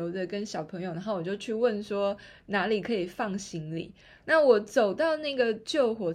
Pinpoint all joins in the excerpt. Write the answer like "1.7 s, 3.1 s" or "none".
none